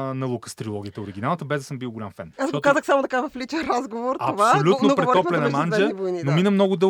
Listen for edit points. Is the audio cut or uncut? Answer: cut